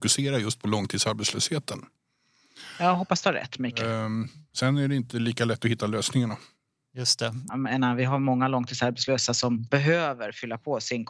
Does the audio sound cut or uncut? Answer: cut